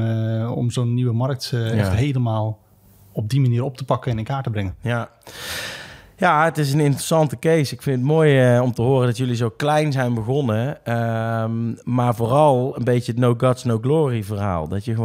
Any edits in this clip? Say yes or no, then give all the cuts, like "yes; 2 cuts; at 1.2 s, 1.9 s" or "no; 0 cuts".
no; 0 cuts